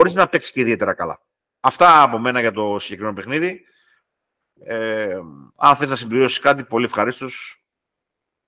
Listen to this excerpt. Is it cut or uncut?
uncut